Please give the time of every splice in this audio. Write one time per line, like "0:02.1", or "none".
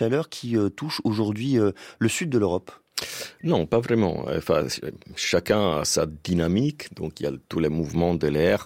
none